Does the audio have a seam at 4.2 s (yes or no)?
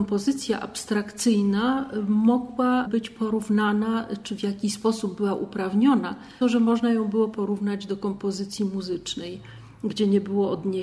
no